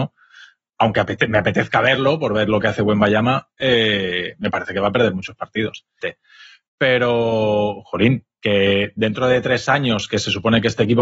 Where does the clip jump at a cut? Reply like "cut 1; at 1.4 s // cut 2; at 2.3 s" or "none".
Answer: cut 1; at 6.0 s